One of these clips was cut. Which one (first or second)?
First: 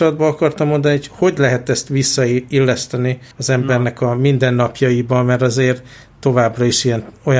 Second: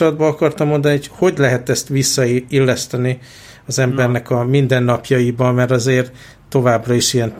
first